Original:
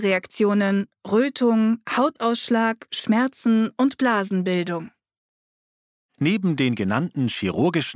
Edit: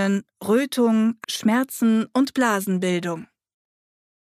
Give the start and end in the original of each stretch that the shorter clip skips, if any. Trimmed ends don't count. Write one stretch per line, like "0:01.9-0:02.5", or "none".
0:01.9-0:02.9